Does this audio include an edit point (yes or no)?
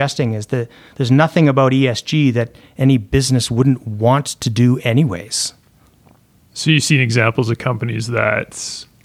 no